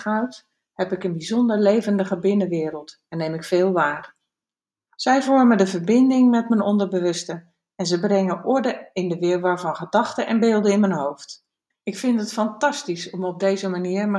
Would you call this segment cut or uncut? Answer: cut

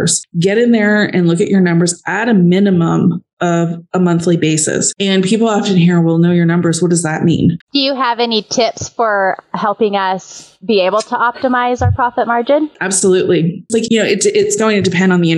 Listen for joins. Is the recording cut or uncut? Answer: cut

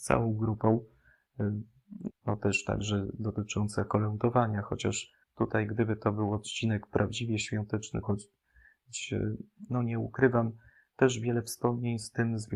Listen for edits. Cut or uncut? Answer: cut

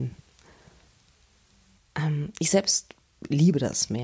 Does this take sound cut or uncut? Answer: cut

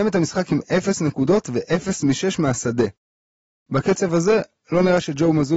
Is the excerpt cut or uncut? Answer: uncut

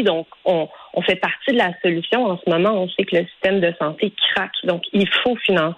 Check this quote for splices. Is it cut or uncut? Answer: uncut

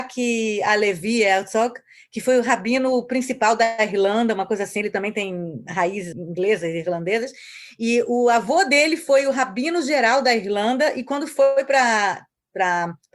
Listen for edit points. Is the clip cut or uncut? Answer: cut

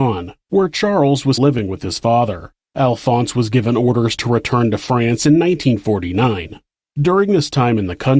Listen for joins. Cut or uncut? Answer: cut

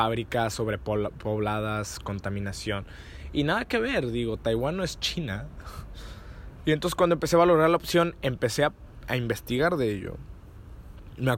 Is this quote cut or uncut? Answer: cut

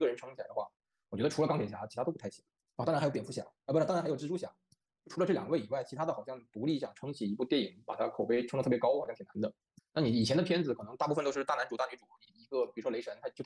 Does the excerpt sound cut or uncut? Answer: cut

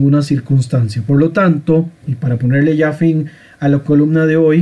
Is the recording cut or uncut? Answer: uncut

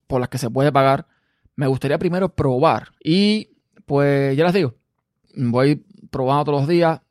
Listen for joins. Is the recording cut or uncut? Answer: cut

